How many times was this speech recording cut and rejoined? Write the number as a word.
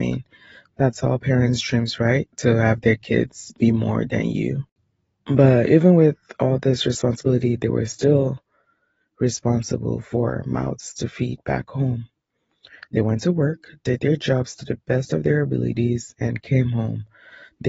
zero